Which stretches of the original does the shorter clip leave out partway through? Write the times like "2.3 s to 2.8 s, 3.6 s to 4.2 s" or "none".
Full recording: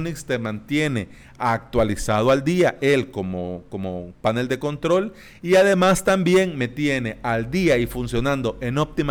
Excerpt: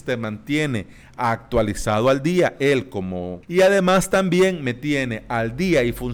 3.6 s to 5.4 s

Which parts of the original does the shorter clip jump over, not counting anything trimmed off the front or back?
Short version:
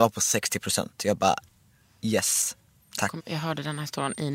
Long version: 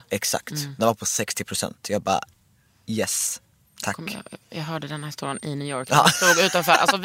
4.0 s to 4.4 s

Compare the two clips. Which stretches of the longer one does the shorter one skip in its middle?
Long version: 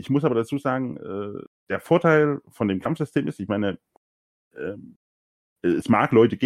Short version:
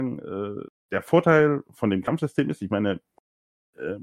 none

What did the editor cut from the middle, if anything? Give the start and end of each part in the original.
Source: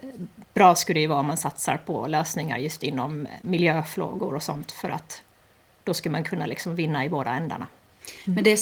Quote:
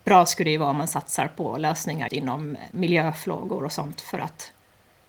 2.6 s to 2.8 s

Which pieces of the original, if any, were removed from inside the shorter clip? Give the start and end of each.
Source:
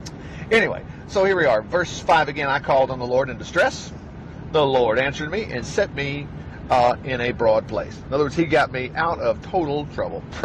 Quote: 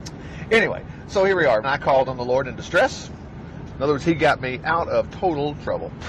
1.6 s to 2.5 s, 4.5 s to 8.0 s

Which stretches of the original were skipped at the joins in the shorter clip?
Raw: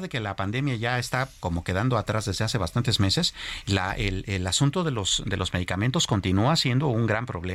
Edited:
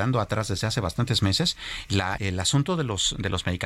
3.9 s to 4.2 s

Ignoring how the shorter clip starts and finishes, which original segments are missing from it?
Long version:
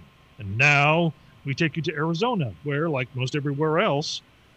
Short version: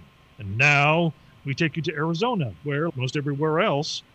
2.9 s to 3.1 s

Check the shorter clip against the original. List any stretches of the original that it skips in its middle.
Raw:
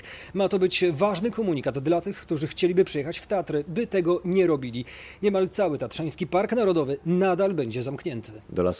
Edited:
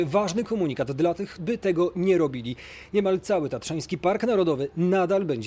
2.2 s to 3.6 s

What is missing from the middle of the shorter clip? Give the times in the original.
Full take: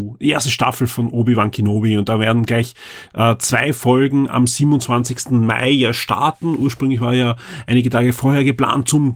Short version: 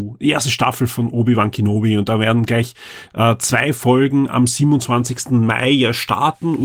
none

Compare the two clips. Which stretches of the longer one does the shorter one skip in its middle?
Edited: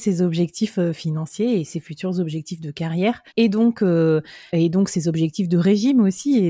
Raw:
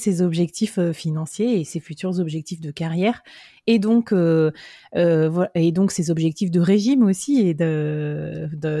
3.3 s to 3.6 s, 4.8 s to 5.5 s

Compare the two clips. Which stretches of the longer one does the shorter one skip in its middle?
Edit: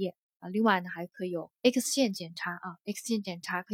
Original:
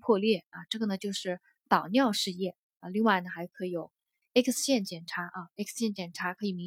4.0 s to 4.3 s

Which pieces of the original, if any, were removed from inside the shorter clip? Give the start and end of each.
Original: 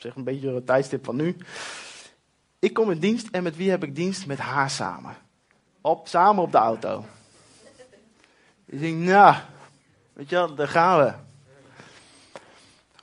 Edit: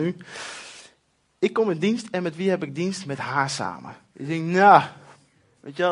5.3 s to 8.6 s

